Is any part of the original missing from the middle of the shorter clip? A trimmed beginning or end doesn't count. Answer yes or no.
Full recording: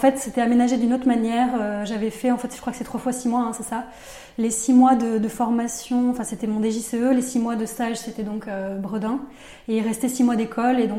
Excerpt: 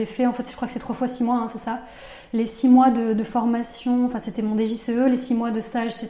no